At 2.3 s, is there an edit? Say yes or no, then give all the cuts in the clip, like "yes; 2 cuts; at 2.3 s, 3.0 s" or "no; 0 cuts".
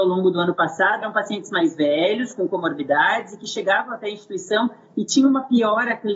no; 1 cut; at 1.0 s